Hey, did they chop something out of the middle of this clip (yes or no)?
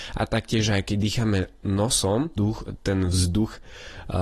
yes